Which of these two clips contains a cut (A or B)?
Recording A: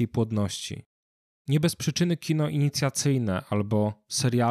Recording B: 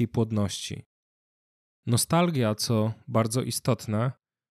A